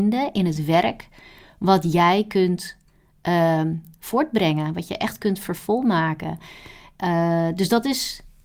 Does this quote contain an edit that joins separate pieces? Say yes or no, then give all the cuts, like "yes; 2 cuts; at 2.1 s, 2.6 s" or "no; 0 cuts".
no; 0 cuts